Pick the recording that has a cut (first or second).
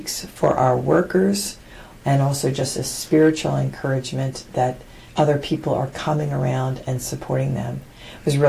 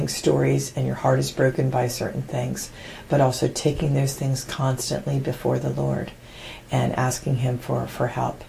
first